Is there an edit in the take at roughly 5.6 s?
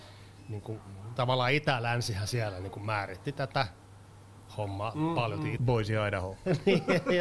yes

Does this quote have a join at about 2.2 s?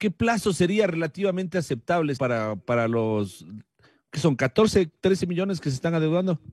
yes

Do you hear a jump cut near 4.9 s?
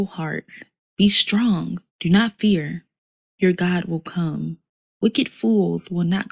yes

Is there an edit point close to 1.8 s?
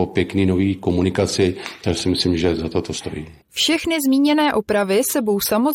no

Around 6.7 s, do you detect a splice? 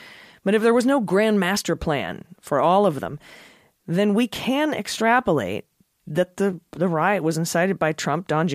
yes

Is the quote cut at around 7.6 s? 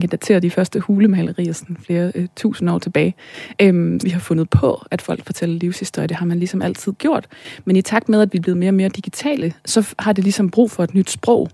no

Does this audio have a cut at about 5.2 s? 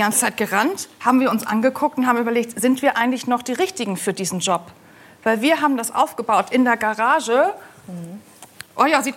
no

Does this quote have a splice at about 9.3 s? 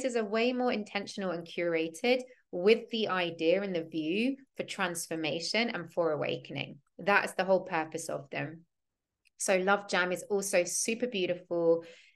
no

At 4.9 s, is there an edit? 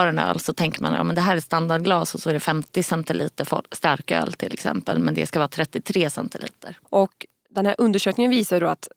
no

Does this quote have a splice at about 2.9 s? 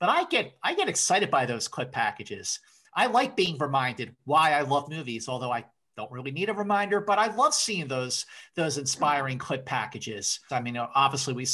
no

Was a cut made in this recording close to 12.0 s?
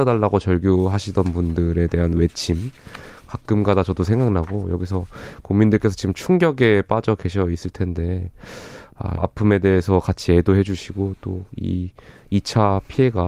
no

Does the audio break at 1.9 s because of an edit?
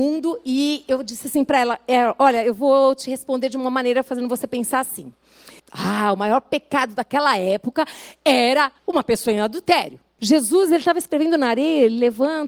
no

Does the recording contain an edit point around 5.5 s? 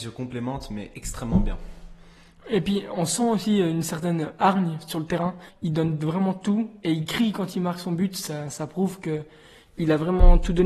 yes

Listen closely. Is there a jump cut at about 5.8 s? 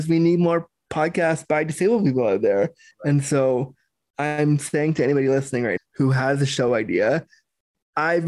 yes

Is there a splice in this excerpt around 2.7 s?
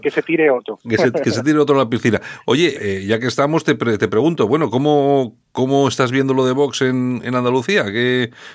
yes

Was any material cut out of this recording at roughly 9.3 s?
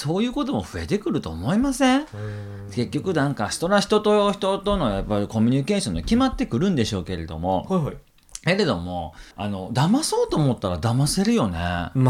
yes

